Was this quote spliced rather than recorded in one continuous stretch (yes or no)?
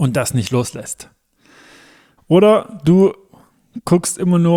yes